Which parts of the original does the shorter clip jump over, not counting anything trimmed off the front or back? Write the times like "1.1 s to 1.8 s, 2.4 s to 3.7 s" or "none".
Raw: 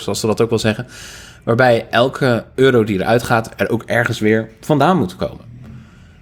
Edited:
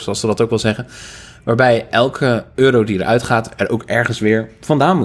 none